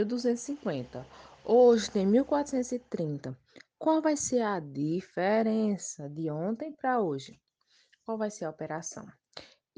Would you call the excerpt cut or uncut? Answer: uncut